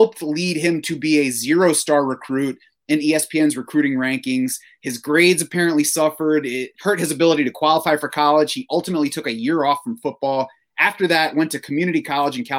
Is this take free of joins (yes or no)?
no